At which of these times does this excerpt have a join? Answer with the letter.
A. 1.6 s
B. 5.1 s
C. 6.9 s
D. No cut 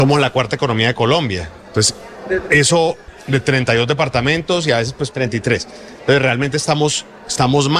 B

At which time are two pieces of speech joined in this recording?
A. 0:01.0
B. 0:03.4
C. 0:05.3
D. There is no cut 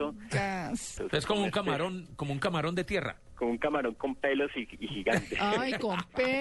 A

